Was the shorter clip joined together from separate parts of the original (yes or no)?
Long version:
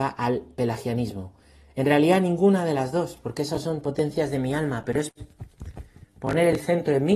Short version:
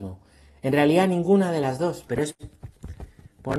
yes